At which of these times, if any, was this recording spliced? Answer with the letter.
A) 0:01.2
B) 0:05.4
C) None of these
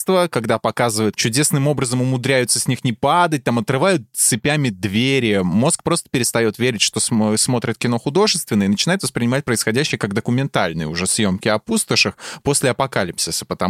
A